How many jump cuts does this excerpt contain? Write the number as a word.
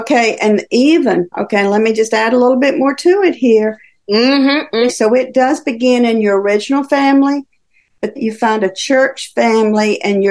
two